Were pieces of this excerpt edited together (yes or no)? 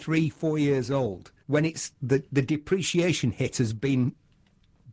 yes